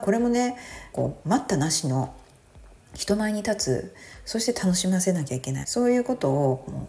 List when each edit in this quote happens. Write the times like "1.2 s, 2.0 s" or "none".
0.9 s, 5.6 s